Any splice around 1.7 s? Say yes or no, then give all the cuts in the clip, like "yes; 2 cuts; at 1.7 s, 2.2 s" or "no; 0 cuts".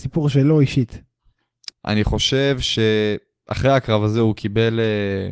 yes; 1 cut; at 1.7 s